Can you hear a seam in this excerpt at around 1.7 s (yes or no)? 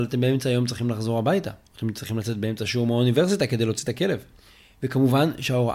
yes